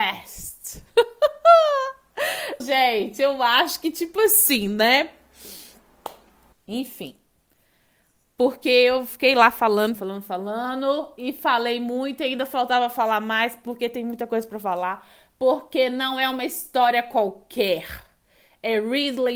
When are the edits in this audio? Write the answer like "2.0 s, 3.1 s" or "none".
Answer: 2.6 s, 6.5 s, 10.0 s